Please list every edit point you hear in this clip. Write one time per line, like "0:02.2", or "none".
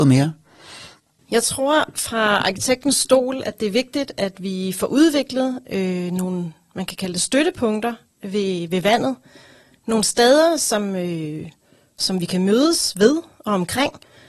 none